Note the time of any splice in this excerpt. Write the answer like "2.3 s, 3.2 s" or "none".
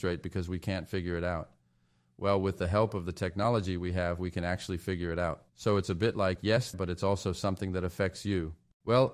5.5 s, 6.7 s